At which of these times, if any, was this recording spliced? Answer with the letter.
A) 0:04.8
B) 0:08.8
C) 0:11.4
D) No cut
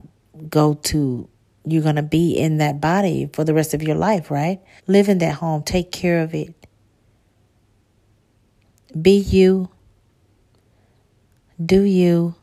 A